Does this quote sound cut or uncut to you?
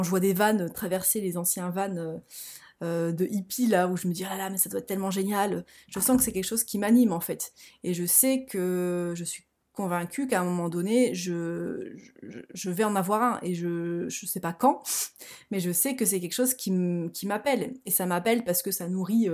uncut